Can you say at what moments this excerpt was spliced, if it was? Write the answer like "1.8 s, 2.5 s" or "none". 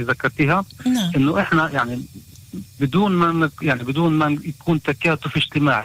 none

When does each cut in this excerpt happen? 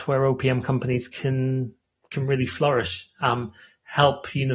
none

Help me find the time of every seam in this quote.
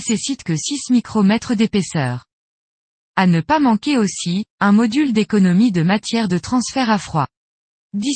4.5 s

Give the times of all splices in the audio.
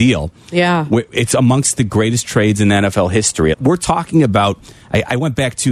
3.5 s

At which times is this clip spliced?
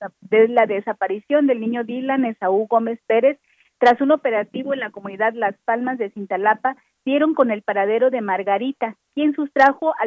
none

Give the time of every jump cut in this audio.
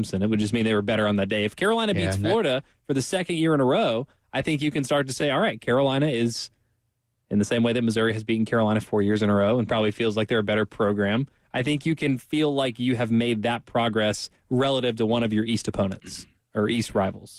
none

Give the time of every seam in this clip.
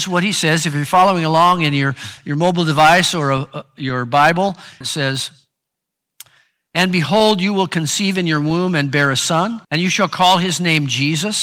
4.8 s, 9.6 s

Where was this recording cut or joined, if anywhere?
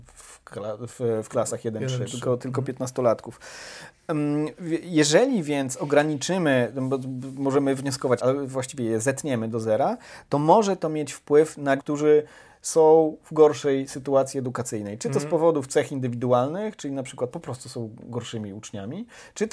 8.2 s, 11.8 s

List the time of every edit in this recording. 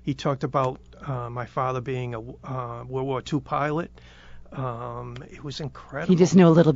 none

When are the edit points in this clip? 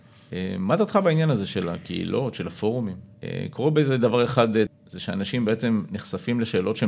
3.1 s, 4.7 s

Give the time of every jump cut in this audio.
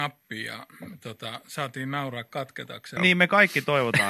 3.0 s

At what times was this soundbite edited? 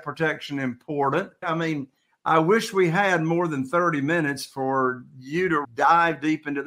1.4 s, 5.6 s

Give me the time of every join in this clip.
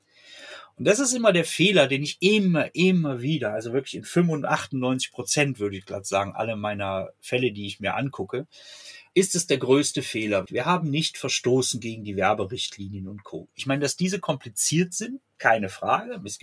9.1 s, 10.5 s

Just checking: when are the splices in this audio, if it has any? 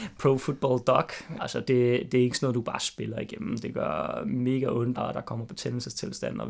1.4 s, 5.0 s

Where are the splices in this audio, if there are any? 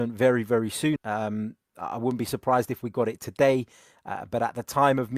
1.0 s

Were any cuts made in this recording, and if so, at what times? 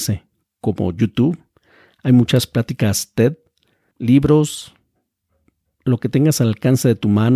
3.9 s

